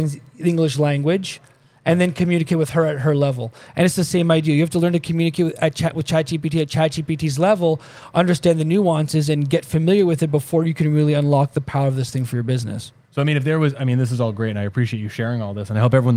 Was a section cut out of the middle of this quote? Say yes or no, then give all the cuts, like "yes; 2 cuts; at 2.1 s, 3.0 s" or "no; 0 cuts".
yes; 1 cut; at 13.1 s